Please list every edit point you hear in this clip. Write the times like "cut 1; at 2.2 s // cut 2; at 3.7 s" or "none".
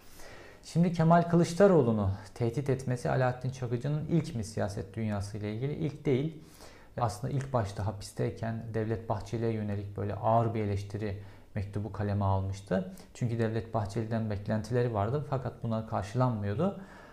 cut 1; at 7.0 s